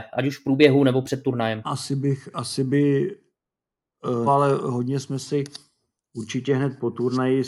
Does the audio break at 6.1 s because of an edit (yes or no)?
no